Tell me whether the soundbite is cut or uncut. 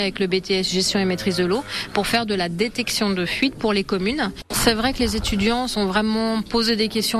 cut